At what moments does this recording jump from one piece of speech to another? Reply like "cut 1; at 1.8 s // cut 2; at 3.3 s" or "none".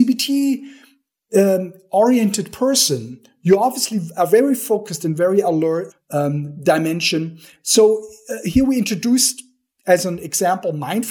cut 1; at 5.9 s